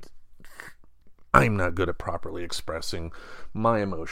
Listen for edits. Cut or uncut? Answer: cut